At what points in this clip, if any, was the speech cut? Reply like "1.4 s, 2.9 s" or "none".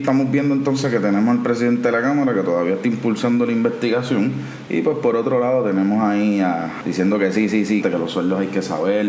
4.7 s, 6.8 s, 7.8 s

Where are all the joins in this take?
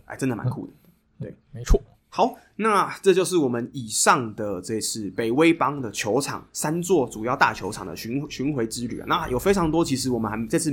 none

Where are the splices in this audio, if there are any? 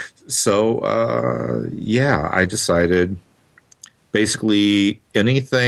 none

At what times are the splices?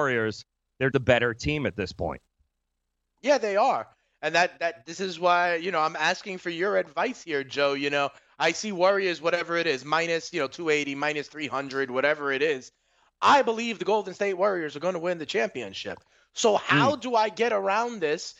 0.9 s

